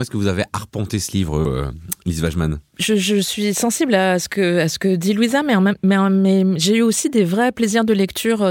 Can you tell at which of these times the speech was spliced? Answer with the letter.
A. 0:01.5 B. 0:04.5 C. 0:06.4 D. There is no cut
A